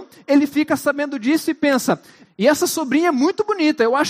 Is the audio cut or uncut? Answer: cut